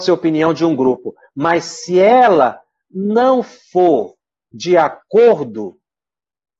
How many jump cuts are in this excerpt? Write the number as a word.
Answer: zero